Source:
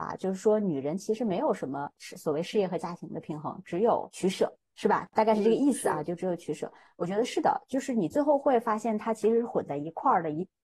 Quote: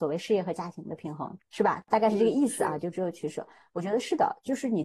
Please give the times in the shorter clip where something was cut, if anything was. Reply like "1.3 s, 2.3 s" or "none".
1.4 s